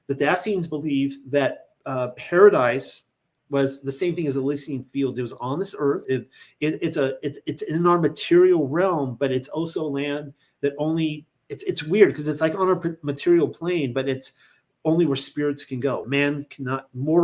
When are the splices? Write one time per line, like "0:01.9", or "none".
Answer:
0:06.0
0:16.0